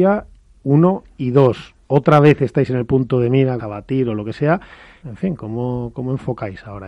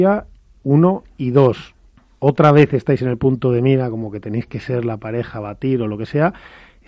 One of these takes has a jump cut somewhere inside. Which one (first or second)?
first